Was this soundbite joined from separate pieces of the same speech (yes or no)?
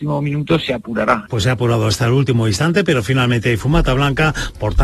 yes